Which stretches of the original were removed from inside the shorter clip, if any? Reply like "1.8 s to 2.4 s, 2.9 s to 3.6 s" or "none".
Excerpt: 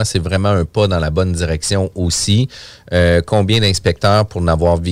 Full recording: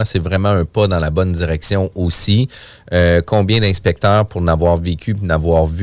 none